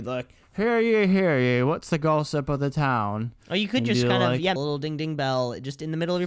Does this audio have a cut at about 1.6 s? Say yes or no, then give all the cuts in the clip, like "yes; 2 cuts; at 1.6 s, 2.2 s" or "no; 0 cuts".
no; 1 cut; at 4.6 s